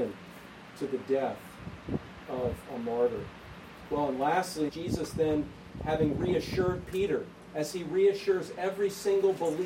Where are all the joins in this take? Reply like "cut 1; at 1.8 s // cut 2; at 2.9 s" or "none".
cut 1; at 4.7 s